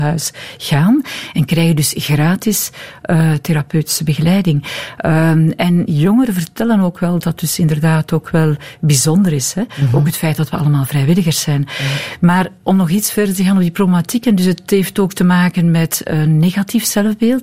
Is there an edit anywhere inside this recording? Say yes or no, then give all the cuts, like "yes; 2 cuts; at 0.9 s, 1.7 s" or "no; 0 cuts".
yes; 1 cut; at 7.2 s